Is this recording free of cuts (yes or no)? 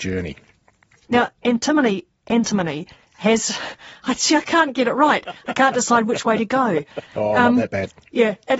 no